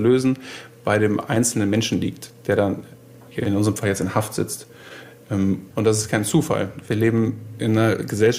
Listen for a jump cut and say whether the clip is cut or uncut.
cut